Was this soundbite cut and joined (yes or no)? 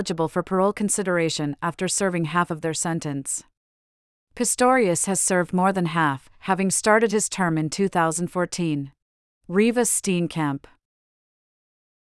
yes